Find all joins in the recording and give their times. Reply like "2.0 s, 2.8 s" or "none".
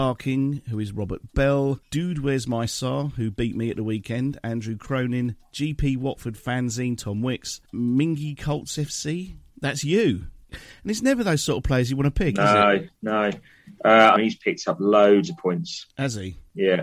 10.5 s, 14.2 s